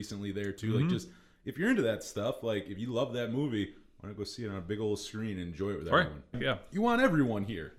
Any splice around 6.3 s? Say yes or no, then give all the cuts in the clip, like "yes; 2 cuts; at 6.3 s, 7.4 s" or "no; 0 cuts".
yes; 1 cut; at 6.3 s